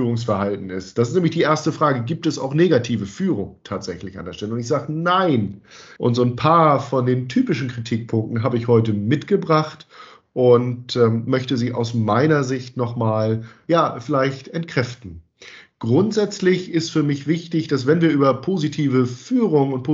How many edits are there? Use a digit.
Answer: 1